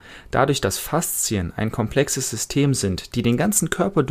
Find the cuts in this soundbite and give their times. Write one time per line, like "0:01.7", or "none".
none